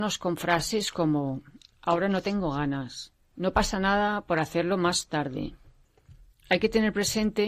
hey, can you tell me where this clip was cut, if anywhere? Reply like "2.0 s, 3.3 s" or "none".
none

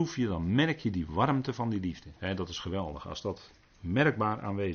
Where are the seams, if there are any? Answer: 2.2 s

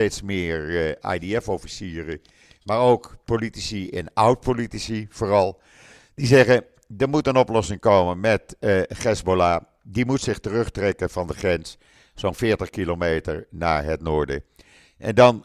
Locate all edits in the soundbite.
none

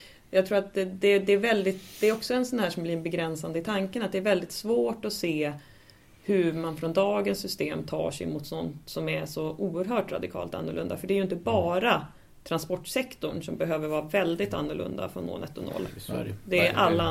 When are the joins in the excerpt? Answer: none

